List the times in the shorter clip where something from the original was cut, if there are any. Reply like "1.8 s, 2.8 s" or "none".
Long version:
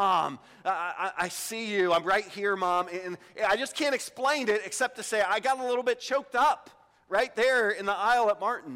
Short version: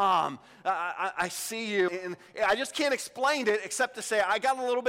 1.9 s